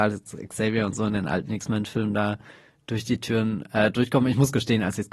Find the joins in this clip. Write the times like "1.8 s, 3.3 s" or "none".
none